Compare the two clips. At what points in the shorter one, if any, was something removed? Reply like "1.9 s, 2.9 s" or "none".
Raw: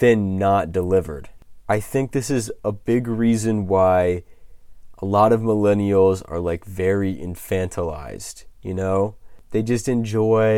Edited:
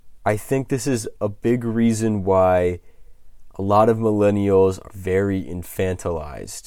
4.9 s